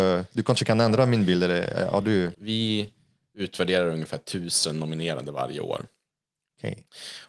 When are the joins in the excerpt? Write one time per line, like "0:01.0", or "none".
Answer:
0:02.3